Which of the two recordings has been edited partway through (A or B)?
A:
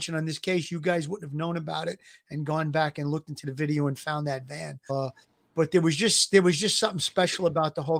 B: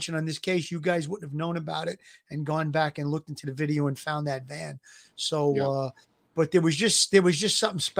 A